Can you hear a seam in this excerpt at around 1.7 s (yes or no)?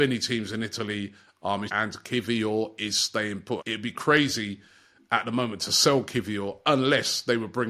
yes